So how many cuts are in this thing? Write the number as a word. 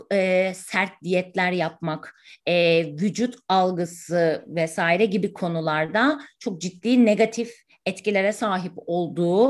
zero